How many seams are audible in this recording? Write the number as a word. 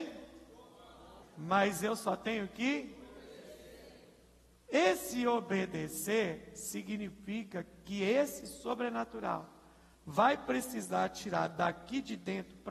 one